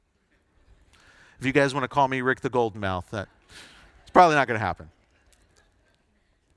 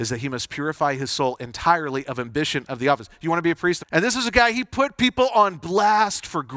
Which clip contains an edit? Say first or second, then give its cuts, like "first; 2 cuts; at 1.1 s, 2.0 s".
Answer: second; 1 cut; at 3.8 s